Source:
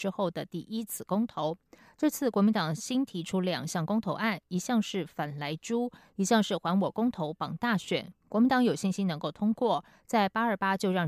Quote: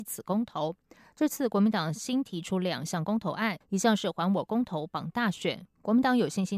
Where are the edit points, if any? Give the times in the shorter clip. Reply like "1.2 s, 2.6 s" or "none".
3.6 s